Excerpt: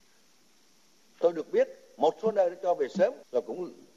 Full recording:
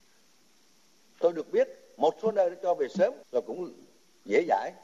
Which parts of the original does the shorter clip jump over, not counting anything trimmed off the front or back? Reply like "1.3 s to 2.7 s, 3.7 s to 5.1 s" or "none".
none

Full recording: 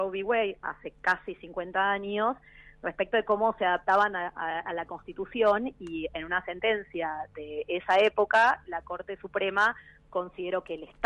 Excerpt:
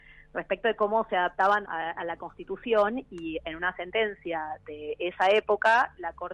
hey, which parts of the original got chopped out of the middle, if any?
4.1 s to 4.3 s

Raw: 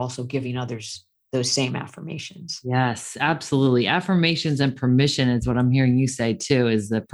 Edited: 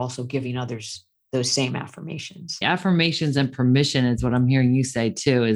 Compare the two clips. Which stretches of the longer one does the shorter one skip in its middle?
2.6 s to 3.8 s

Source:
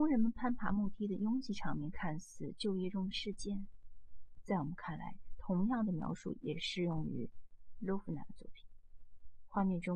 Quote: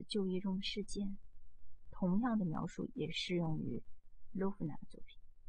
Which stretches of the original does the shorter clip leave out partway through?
4.4 s to 5.4 s

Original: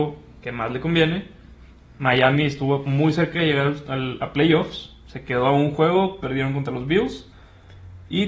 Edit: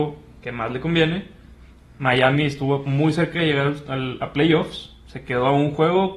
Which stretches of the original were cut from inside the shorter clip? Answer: none

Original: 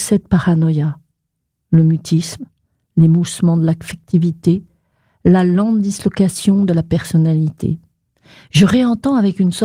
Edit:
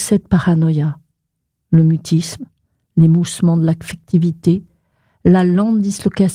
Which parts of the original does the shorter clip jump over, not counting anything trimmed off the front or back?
none

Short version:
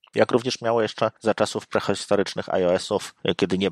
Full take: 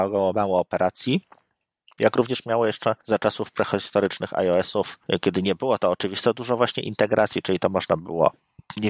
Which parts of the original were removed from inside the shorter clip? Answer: none

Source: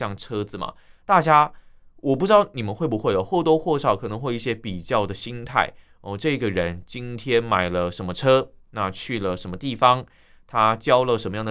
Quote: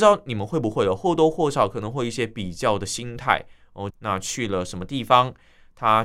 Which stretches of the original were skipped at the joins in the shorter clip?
6.2 s to 8.6 s

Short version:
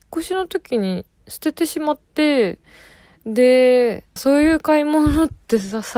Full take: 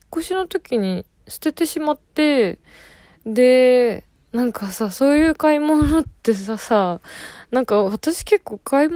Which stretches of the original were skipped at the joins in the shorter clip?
4.2 s to 4.9 s

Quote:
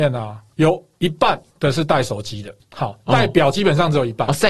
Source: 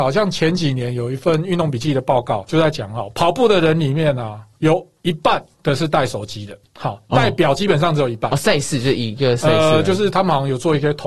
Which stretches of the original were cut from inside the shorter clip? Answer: none

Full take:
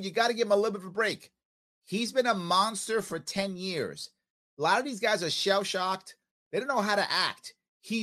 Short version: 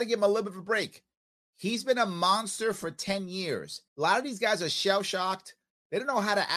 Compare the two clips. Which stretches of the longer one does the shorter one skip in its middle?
4.2 s to 4.5 s

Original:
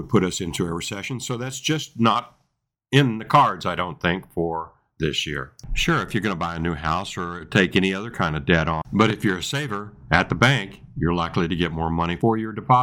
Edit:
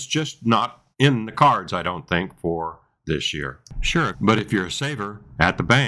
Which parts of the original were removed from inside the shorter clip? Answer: 2.4 s to 2.8 s, 6.0 s to 8.8 s

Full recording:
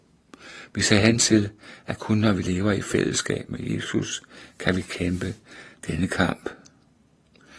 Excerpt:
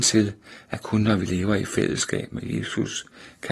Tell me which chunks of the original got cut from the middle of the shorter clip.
none

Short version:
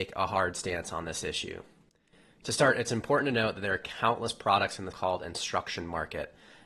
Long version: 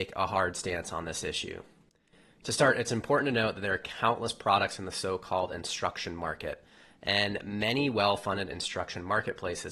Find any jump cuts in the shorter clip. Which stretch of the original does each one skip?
4.9 s to 5.2 s

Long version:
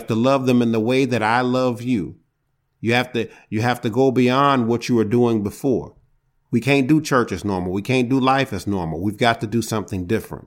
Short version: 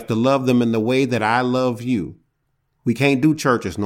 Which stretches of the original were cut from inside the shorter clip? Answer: 2.8 s to 6.4 s

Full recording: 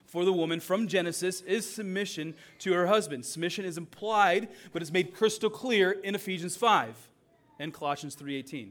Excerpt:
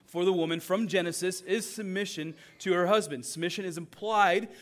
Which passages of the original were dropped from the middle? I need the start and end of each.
none

